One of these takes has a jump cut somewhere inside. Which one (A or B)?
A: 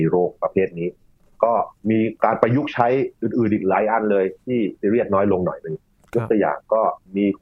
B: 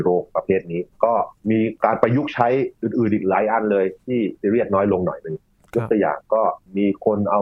B